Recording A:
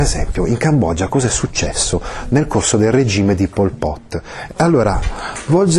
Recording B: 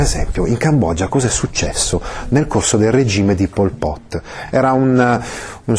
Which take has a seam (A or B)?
A